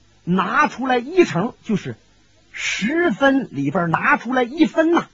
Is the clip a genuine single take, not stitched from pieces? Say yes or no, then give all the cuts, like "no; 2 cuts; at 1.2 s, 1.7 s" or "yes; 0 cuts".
yes; 0 cuts